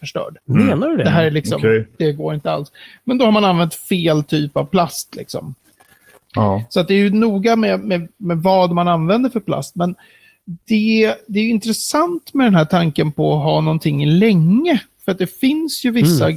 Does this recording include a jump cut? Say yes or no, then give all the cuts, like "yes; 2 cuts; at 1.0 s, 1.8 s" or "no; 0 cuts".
no; 0 cuts